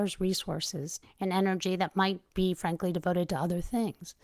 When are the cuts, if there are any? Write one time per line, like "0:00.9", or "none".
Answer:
0:01.0
0:02.3